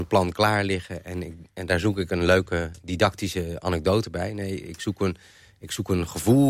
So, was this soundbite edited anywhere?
no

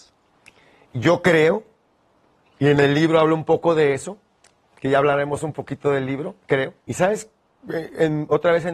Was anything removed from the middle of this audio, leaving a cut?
yes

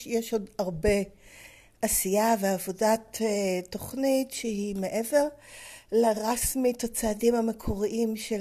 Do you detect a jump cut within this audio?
no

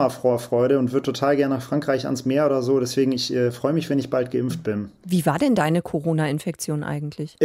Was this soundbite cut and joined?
no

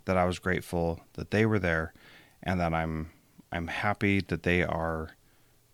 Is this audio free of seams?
yes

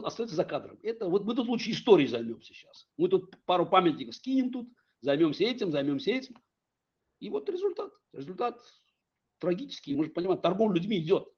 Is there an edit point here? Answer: yes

